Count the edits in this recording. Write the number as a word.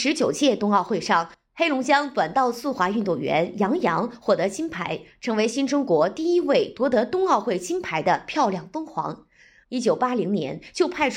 one